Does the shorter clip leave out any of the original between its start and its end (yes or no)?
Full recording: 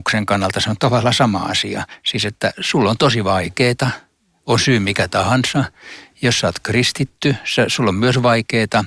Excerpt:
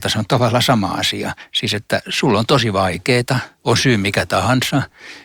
yes